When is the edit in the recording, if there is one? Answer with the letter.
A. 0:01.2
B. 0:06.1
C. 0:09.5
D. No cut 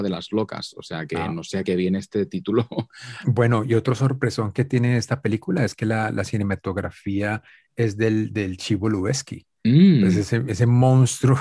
D